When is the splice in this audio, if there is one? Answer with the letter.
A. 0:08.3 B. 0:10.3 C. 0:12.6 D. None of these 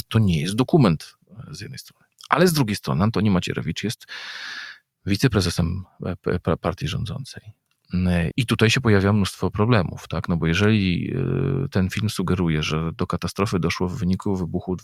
A